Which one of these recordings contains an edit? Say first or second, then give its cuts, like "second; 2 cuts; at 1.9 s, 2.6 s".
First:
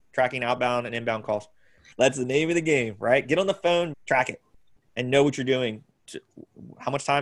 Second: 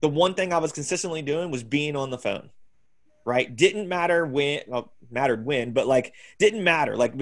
first; 3 cuts; at 1.9 s, 3.9 s, 5.9 s